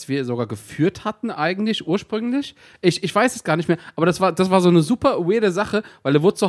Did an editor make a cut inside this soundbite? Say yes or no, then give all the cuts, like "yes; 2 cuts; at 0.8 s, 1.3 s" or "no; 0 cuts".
no; 0 cuts